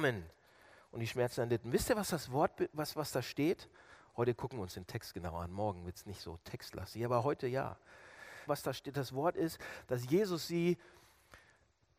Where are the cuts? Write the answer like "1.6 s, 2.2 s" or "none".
8.5 s